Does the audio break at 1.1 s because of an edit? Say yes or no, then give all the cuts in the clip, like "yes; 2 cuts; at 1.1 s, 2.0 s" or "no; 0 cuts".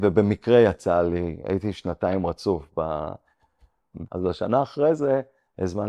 no; 1 cut; at 4.1 s